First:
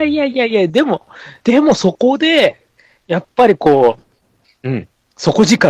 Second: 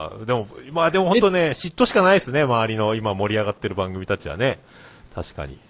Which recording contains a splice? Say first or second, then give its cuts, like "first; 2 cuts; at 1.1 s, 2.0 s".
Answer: first; 1 cut; at 1.4 s